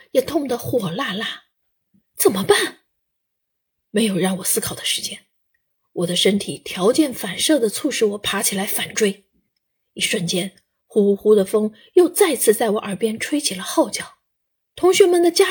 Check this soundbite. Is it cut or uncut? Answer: uncut